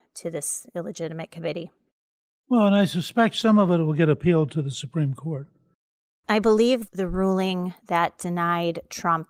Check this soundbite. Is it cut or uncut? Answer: uncut